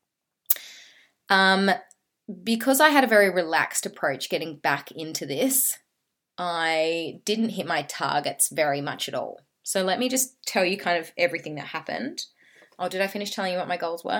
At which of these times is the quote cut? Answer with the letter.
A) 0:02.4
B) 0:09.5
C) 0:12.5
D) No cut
D